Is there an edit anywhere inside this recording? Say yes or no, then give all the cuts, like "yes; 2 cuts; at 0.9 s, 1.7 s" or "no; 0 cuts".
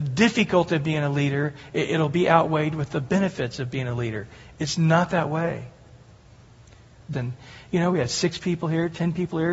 yes; 1 cut; at 7.1 s